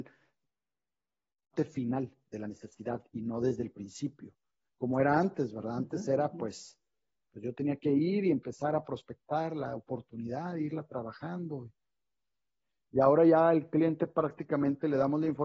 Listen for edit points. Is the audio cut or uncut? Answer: uncut